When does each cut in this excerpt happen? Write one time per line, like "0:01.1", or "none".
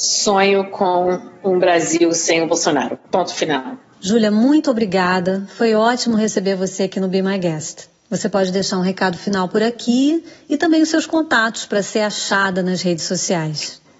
0:03.1

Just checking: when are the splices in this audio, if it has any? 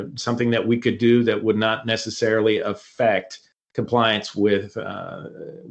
none

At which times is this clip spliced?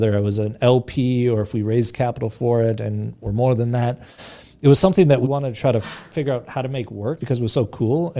0:05.2
0:07.2

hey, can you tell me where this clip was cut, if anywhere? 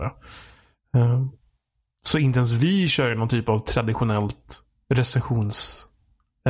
none

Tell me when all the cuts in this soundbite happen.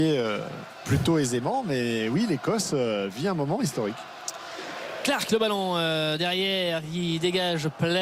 none

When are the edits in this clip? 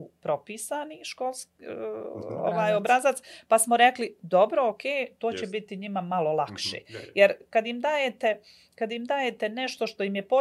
none

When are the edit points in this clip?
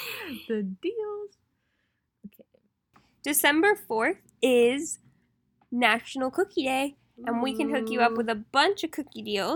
none

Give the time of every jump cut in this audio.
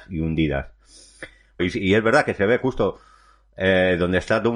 0:01.6

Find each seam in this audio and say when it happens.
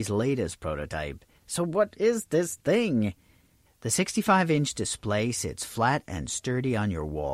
0:01.4
0:03.7

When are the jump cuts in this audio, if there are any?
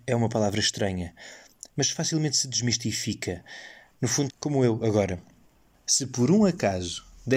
0:04.3

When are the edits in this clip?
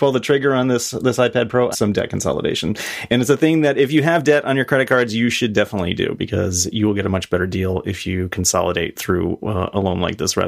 0:01.7

